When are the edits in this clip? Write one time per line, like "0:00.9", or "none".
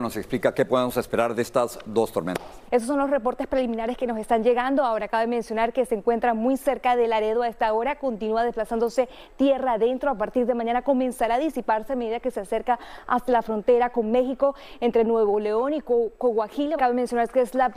0:02.7
0:16.8